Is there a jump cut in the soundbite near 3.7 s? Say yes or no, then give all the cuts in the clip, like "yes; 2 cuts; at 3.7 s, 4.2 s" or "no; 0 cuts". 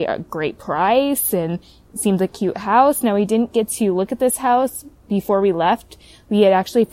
no; 1 cut; at 2.3 s